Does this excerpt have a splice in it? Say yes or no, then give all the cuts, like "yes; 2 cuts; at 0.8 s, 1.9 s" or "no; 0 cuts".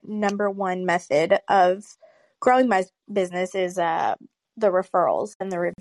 no; 0 cuts